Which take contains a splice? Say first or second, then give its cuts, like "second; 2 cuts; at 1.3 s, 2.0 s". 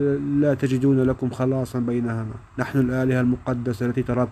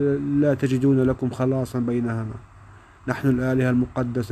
first; 1 cut; at 2.5 s